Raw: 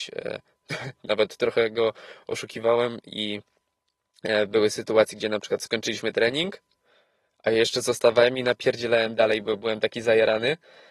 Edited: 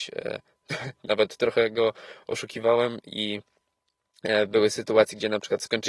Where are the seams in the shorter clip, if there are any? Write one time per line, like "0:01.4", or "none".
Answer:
none